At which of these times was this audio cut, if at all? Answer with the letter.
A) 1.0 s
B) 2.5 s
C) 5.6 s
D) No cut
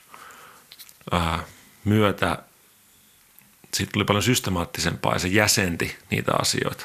D